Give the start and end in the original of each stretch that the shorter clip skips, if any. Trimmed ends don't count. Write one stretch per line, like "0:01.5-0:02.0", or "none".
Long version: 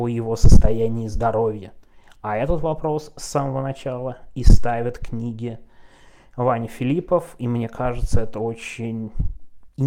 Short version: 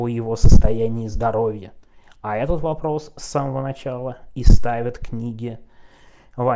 none

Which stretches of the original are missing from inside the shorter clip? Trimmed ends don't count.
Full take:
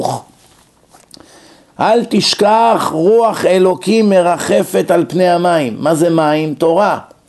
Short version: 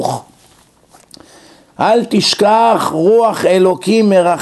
none

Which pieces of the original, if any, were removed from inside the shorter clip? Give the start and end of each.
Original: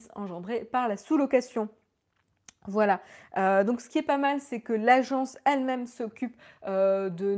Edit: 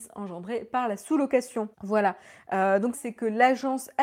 0:01.7-0:02.6
0:03.8-0:04.4

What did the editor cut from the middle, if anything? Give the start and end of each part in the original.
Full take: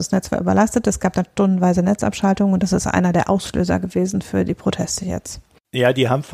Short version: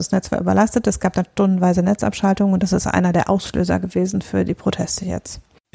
none

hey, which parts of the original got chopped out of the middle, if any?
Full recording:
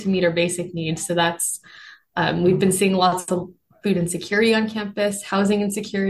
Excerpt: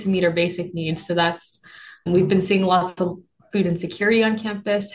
0:02.1-0:02.4

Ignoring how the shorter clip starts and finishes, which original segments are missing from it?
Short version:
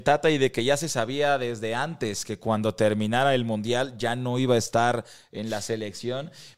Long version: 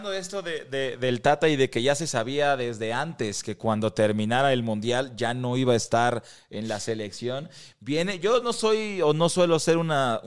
none

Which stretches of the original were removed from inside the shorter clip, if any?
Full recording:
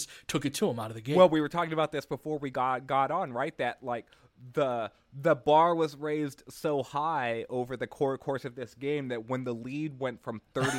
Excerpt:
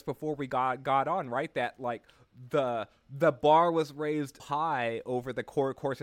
0:06.4-0:06.8

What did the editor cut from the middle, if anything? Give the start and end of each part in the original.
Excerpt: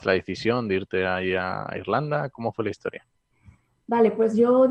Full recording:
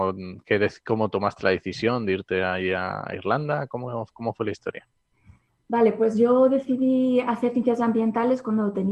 0:03.7-0:04.1

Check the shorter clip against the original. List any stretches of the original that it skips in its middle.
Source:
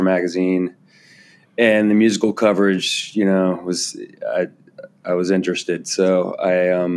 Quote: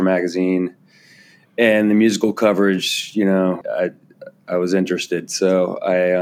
0:03.6-0:04.2

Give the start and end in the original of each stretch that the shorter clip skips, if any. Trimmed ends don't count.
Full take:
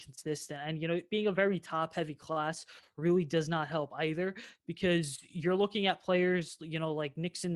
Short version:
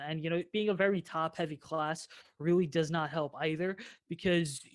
none

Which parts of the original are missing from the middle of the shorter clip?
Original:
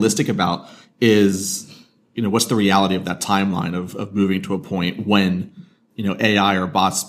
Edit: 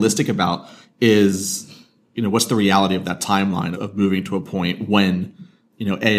0:03.7-0:03.9

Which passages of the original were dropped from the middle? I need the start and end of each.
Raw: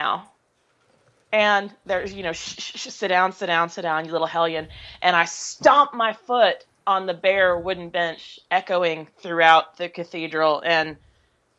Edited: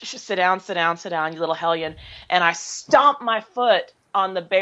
none

